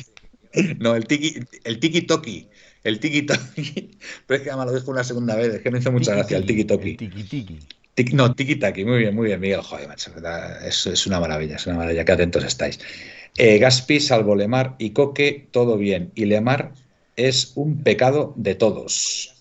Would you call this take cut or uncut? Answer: cut